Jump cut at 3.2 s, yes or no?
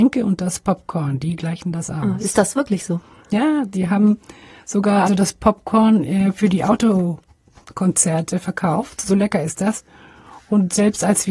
no